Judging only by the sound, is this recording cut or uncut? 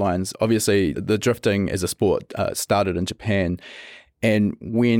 cut